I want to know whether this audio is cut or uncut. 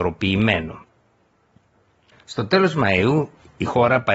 cut